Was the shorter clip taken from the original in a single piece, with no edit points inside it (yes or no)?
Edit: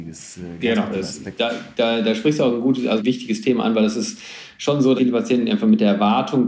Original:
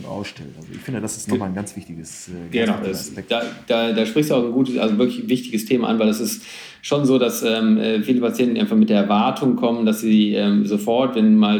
no